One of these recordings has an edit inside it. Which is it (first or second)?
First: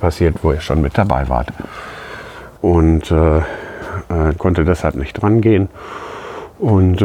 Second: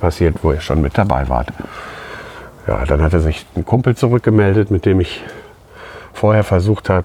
first